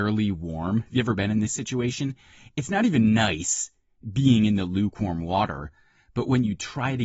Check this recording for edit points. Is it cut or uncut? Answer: uncut